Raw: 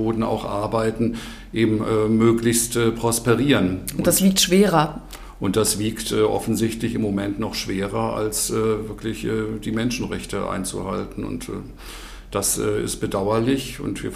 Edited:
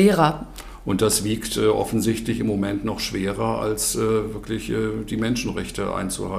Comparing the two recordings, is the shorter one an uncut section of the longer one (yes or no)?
yes